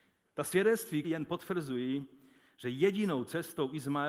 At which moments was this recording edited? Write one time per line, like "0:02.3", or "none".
0:01.0